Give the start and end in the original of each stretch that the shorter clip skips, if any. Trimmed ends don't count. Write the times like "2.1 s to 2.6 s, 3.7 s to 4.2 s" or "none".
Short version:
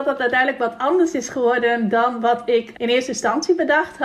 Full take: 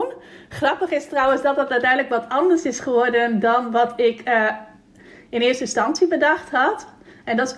4.2 s to 5.3 s